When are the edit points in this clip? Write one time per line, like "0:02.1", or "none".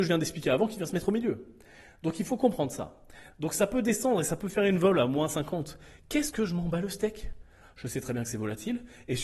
0:03.3